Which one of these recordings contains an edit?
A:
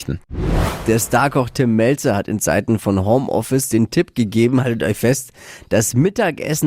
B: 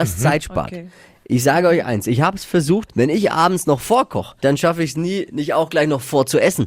B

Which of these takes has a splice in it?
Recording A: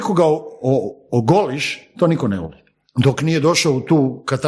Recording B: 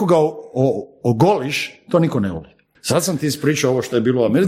B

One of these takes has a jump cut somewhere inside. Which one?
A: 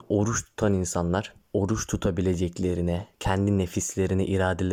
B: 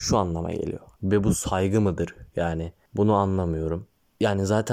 B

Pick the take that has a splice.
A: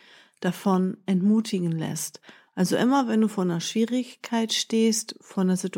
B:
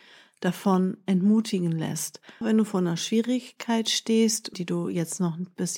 B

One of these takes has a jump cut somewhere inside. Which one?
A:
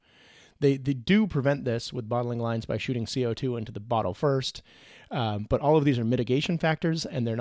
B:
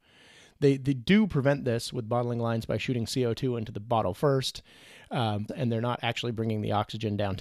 B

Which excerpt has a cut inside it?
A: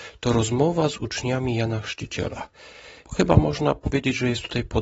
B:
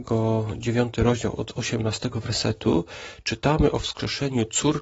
A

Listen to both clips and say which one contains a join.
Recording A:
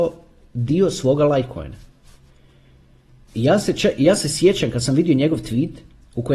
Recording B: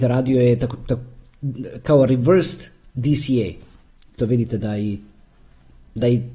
B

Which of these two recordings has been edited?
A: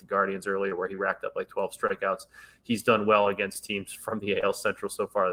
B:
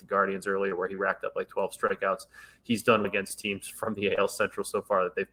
B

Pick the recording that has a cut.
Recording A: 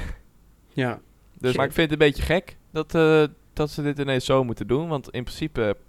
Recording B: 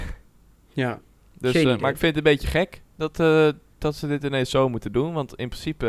A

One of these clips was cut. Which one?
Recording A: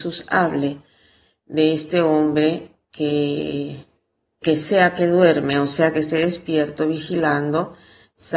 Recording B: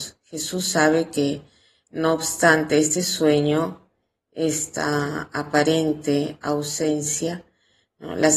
A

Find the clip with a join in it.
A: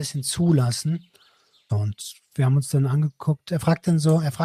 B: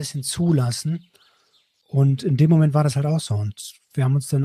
A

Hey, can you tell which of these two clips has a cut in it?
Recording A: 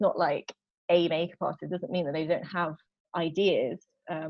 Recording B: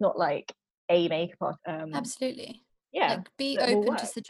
B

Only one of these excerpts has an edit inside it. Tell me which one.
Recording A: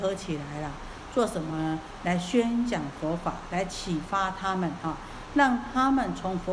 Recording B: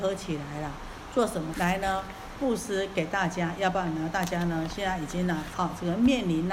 B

